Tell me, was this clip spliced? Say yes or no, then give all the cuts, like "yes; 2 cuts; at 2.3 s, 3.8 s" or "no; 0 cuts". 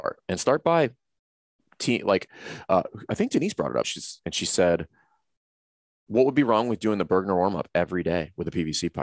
yes; 1 cut; at 3.8 s